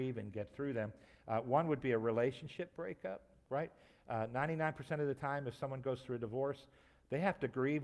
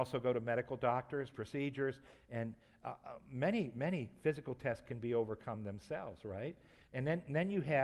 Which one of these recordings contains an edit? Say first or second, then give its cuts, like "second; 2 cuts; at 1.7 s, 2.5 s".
second; 1 cut; at 1.3 s